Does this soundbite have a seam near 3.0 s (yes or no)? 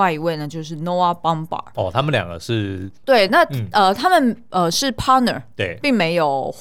yes